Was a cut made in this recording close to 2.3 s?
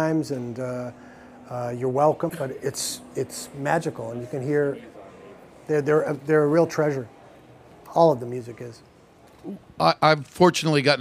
yes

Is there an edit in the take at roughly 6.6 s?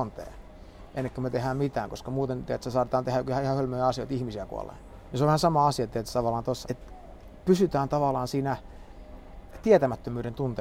yes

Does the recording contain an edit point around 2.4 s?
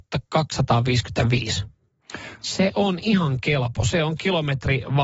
yes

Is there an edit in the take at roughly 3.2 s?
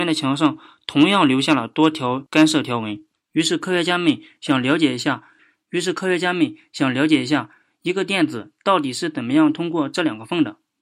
yes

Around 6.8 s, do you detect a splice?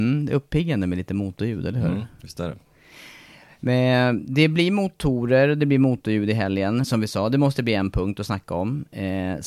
yes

